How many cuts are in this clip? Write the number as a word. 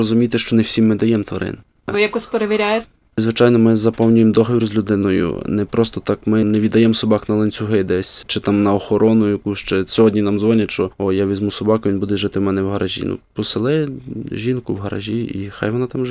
zero